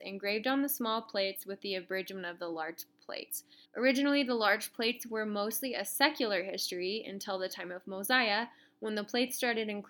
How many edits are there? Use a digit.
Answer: 1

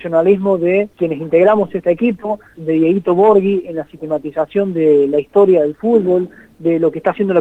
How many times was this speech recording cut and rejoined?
2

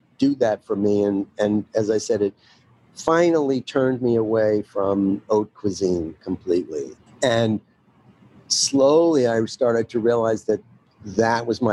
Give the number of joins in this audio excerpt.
1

